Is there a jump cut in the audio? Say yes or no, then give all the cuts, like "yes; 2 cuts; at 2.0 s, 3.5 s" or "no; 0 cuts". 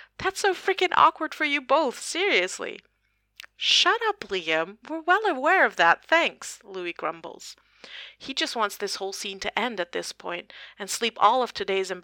no; 0 cuts